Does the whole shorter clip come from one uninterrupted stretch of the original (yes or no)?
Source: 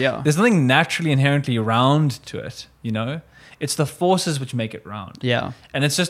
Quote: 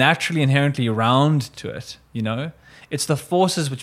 yes